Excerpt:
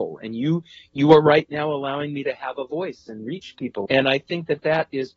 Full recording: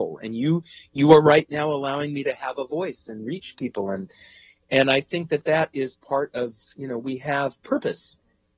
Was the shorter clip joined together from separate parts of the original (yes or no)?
yes